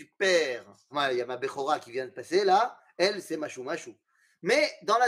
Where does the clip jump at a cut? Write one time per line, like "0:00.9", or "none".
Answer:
0:00.9